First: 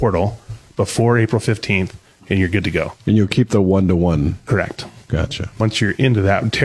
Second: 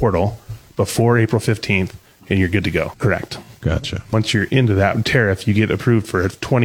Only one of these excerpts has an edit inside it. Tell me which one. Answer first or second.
second